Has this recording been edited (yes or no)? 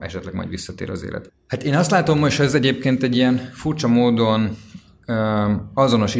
yes